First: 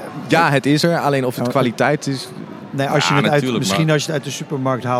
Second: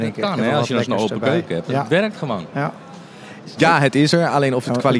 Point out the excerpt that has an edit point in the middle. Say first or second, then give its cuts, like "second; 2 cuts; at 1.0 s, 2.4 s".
second; 1 cut; at 3.6 s